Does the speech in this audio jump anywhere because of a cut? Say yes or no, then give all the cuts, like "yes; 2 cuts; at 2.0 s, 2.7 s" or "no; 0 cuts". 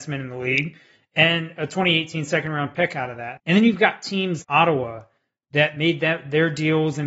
yes; 2 cuts; at 3.4 s, 4.4 s